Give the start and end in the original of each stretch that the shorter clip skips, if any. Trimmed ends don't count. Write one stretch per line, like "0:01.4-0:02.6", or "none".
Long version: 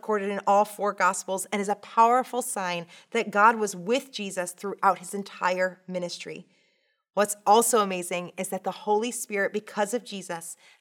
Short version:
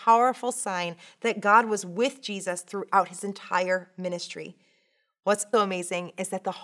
0:07.4-0:07.7